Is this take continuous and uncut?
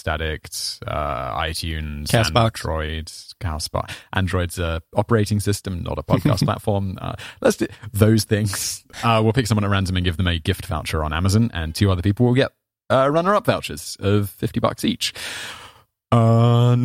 yes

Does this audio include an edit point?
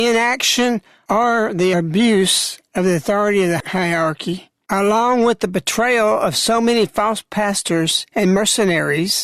no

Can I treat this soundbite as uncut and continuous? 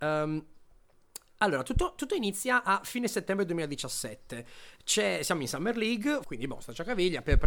no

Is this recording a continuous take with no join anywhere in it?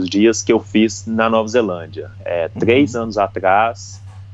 yes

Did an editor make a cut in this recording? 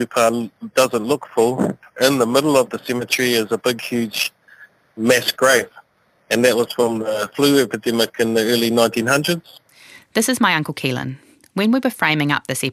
no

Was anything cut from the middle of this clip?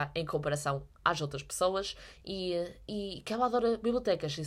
no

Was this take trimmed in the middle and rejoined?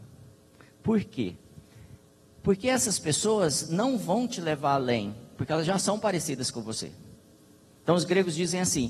no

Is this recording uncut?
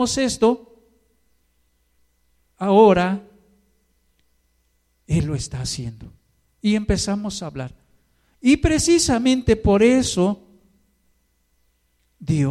yes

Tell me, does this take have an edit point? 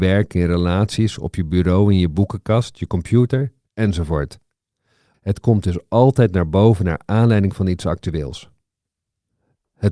yes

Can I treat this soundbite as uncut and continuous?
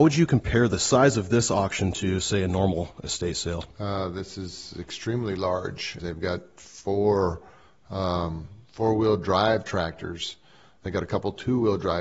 no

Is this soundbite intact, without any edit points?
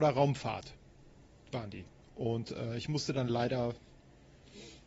yes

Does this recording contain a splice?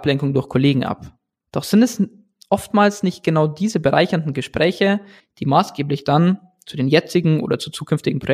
yes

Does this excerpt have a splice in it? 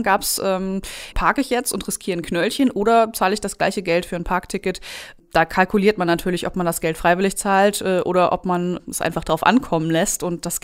yes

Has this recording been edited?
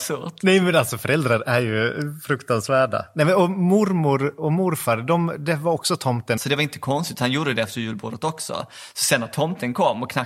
yes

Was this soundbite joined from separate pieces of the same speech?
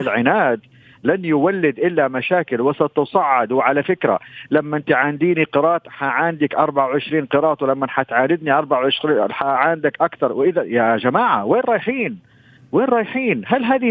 no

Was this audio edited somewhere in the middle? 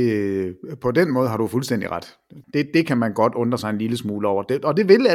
yes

